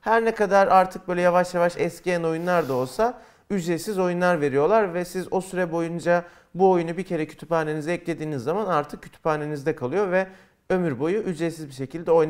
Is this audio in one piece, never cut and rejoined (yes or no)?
yes